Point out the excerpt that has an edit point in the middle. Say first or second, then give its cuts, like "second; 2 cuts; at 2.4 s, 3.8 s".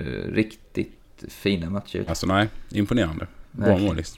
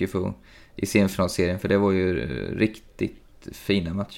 first; 1 cut; at 2.1 s